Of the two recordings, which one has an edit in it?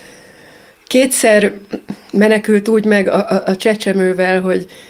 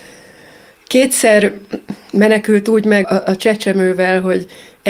second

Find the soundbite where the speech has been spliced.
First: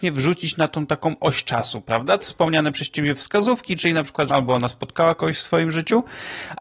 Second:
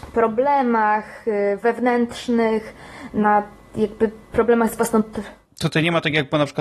first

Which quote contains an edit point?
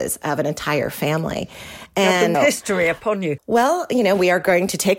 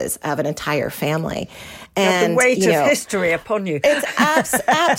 first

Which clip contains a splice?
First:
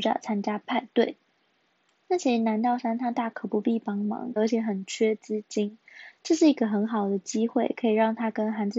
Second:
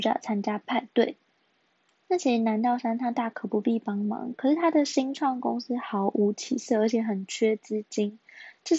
first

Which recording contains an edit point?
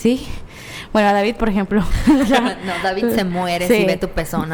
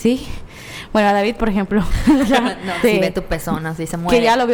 second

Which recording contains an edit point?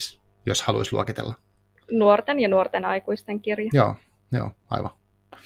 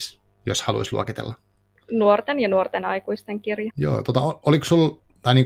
second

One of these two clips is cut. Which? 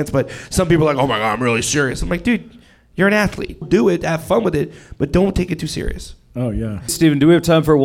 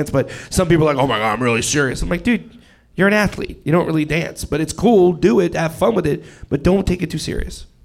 first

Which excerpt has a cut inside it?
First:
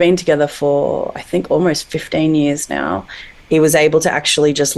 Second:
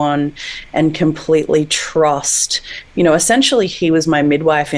first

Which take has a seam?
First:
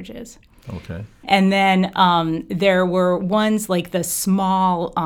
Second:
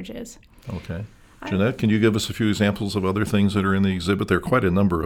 first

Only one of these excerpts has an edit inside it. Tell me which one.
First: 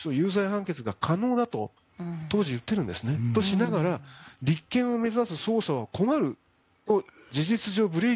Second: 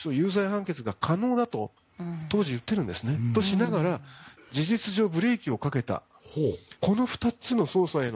second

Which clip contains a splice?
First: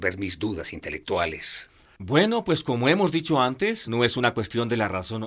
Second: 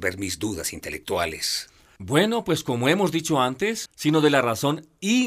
second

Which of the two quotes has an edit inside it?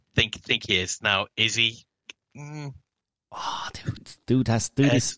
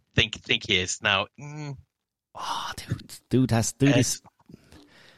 second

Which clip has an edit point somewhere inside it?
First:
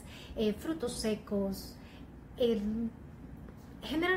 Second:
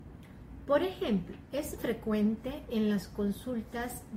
second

